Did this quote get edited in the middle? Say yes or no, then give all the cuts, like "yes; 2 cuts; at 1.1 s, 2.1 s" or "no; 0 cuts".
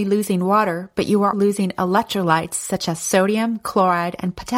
yes; 1 cut; at 1.3 s